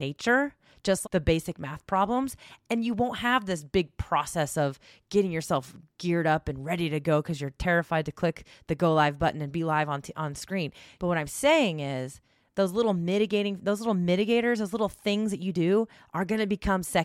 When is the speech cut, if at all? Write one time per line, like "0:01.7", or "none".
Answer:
0:01.0
0:11.0